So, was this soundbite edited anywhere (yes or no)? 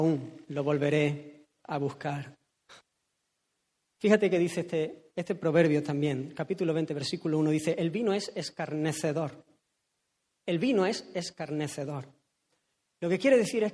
no